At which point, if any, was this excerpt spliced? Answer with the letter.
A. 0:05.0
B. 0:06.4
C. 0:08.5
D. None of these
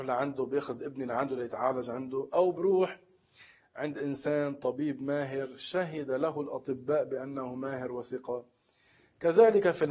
D